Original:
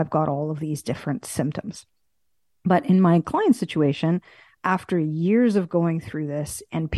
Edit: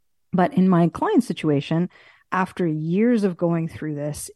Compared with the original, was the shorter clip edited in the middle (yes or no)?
no